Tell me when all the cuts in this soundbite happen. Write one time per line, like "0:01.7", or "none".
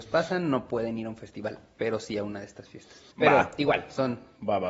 0:03.1